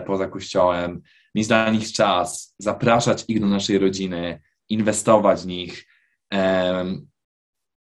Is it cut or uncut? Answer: uncut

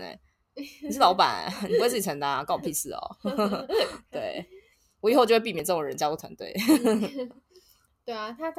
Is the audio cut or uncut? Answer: uncut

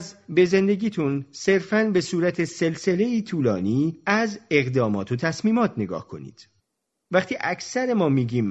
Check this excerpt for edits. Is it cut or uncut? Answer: cut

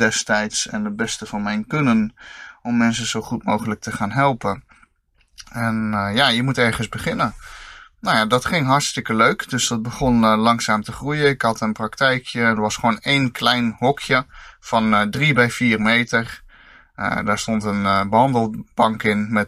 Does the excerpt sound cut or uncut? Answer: uncut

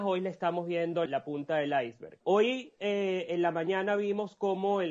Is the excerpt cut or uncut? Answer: cut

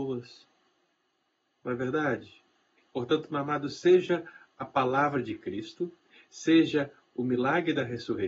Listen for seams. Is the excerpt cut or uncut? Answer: cut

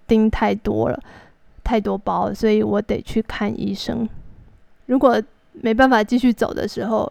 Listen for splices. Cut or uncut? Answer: cut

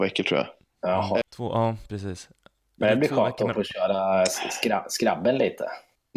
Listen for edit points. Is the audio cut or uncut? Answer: cut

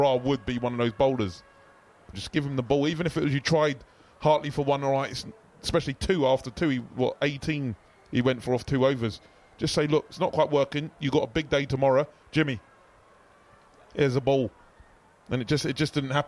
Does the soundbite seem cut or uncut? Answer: cut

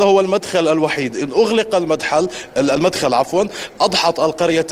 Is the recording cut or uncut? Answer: uncut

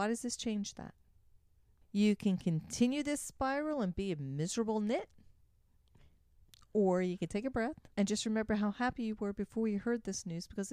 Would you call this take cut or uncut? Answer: cut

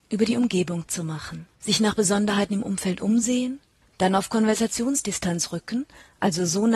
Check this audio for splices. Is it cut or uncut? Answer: cut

